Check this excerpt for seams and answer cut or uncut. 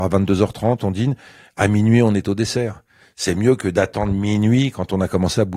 uncut